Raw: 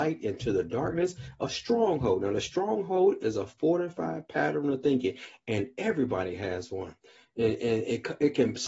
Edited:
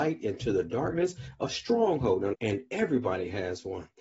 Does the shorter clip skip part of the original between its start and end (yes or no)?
yes